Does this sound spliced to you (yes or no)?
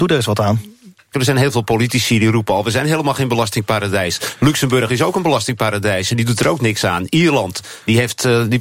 yes